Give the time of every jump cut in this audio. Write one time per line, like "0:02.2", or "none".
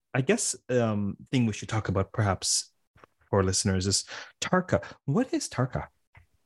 0:01.3